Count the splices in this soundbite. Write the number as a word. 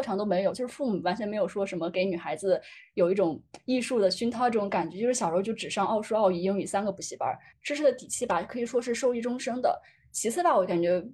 one